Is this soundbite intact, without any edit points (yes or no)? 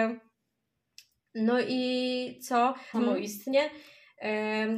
no